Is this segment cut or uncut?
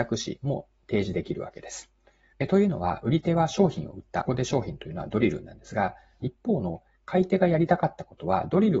cut